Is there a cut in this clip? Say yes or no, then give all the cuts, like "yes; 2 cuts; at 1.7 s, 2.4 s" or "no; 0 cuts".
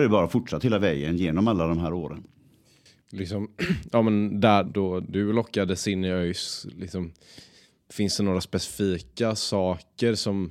yes; 1 cut; at 4.6 s